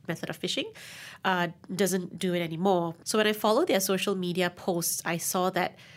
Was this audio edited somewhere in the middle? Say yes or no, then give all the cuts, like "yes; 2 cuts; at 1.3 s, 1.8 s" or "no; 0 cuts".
yes; 1 cut; at 3.0 s